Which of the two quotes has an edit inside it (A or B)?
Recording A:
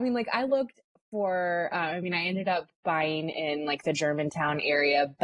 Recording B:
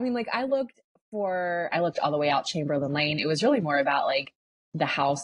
B